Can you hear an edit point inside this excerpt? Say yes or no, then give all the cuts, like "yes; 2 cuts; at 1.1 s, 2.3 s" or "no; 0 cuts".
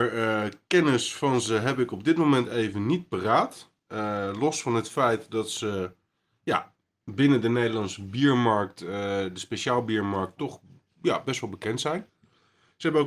no; 0 cuts